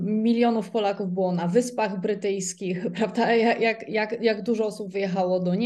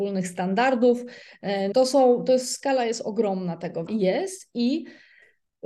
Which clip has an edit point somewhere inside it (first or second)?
second